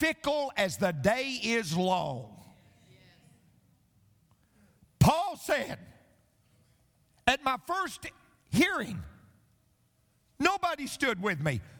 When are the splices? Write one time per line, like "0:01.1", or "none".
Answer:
none